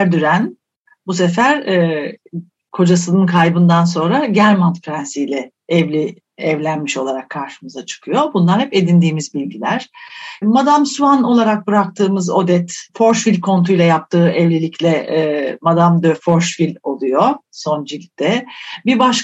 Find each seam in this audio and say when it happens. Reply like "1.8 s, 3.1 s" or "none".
10.4 s, 12.9 s